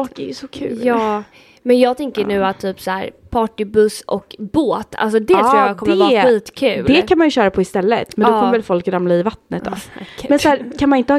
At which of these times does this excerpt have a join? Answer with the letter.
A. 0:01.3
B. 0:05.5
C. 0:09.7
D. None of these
D